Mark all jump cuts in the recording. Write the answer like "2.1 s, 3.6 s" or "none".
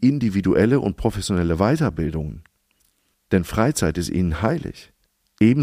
3.1 s

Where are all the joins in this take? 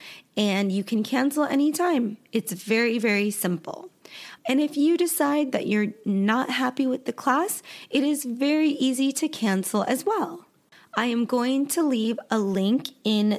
4.4 s

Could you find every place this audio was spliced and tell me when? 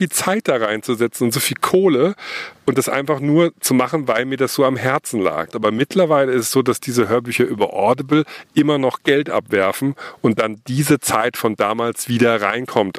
5.5 s

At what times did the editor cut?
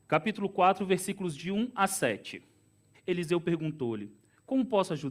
2.9 s

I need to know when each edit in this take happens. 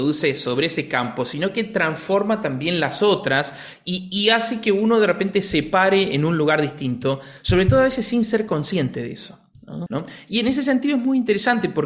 9.9 s

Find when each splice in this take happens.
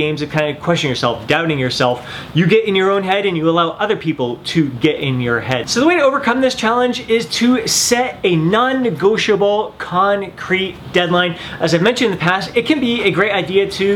none

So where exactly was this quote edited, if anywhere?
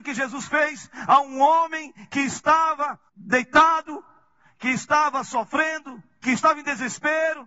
3.1 s, 6.2 s

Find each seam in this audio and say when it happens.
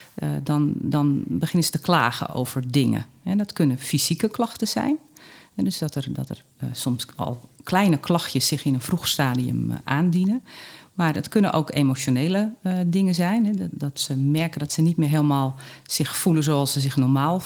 none

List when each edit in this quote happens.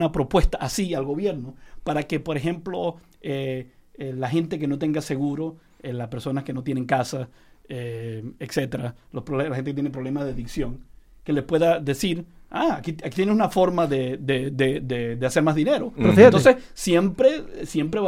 16.0 s

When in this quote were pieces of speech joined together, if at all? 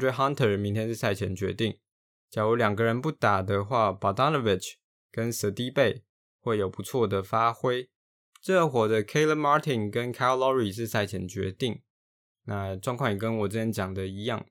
8.3 s

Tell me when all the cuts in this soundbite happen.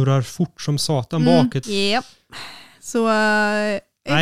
1.6 s

